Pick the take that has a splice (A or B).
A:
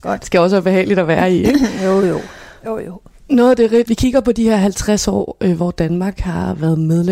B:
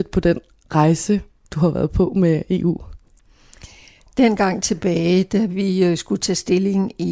A